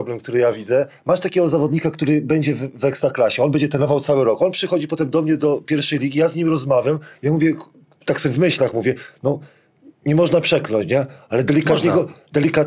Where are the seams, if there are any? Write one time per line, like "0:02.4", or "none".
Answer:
none